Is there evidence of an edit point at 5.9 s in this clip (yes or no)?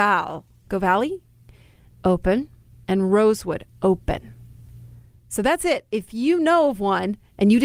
no